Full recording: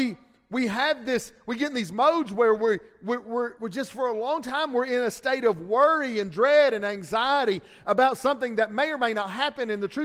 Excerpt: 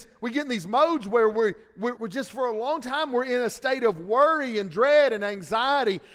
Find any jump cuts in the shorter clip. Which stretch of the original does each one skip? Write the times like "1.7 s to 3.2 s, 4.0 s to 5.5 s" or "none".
3.2 s to 3.6 s